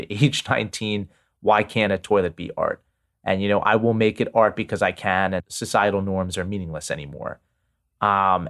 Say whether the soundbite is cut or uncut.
uncut